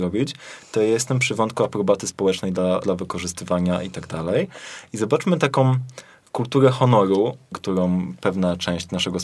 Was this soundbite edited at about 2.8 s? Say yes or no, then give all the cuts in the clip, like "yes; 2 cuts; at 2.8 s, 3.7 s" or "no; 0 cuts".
yes; 1 cut; at 2.8 s